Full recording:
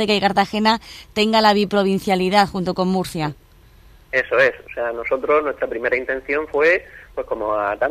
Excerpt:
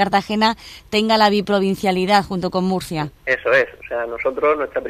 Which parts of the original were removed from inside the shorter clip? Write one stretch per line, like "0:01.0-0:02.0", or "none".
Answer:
0:03.4-0:04.0